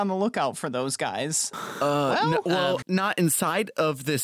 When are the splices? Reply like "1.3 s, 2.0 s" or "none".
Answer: 1.5 s, 2.8 s